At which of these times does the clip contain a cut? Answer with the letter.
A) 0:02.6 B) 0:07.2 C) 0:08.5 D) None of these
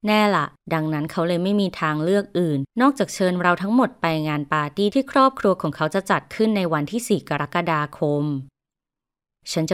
D